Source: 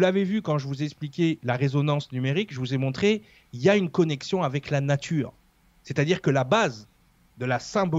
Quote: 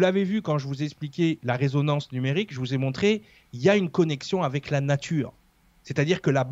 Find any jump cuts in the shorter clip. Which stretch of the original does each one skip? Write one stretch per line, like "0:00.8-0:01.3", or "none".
none